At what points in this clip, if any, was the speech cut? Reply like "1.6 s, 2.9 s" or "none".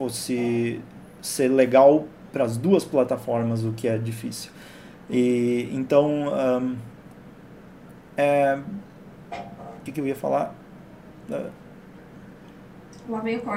9.9 s